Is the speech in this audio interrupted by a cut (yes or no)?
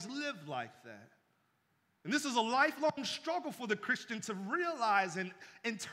yes